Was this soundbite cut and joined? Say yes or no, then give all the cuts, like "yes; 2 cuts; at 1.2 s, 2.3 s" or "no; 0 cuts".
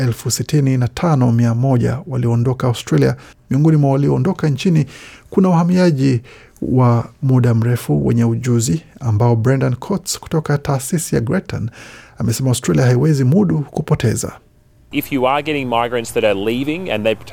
yes; 1 cut; at 3.3 s